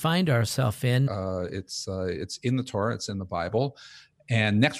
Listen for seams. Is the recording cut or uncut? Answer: cut